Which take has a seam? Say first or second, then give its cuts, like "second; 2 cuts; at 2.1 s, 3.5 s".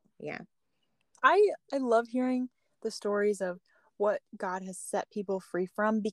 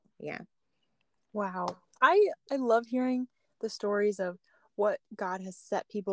first; 1 cut; at 1.1 s